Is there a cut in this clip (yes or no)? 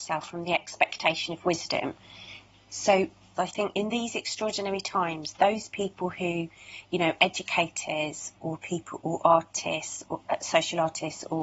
yes